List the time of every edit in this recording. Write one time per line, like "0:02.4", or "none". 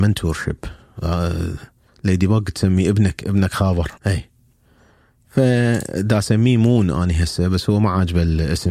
0:04.0